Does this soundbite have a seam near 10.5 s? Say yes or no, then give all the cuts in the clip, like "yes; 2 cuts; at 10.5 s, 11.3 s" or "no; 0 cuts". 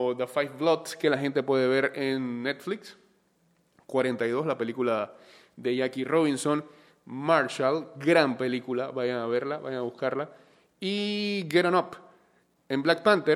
no; 0 cuts